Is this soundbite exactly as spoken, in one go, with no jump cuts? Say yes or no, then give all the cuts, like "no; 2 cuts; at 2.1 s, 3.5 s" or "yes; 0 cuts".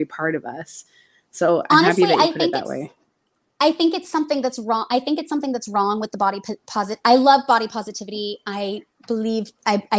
yes; 0 cuts